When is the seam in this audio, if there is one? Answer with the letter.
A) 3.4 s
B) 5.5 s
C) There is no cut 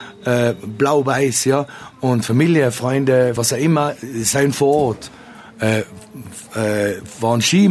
A